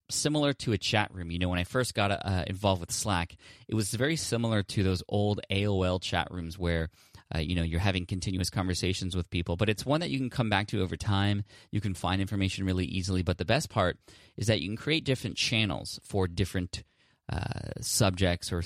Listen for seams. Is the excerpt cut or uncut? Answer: uncut